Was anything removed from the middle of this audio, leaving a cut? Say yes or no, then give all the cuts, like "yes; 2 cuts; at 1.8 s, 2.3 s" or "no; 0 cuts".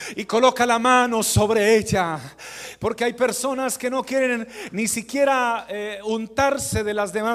no; 0 cuts